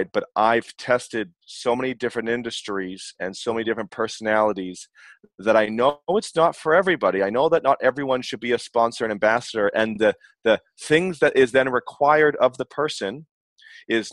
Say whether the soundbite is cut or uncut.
uncut